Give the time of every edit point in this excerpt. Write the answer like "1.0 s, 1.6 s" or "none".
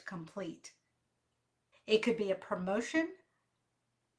1.7 s